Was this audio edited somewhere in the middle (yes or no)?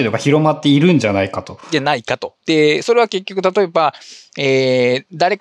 no